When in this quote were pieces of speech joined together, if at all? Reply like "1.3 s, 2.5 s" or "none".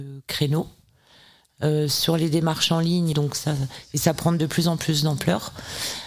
3.1 s